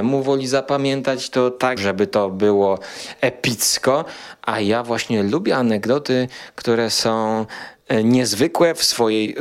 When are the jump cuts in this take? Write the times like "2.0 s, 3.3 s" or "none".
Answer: 1.8 s